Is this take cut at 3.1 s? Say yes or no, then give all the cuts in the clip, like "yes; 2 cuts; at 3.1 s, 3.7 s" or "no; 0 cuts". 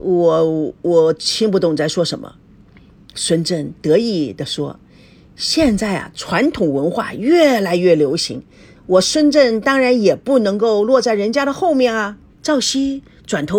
no; 2 cuts; at 8.7 s, 12.3 s